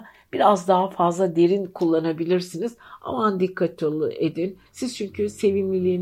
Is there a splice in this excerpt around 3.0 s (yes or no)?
no